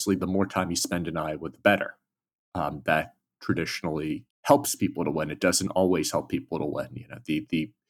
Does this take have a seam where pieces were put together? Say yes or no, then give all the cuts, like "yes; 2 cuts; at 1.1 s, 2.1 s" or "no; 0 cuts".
yes; 1 cut; at 4.3 s